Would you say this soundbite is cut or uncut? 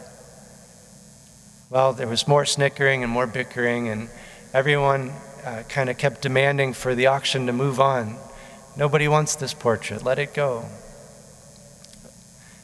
uncut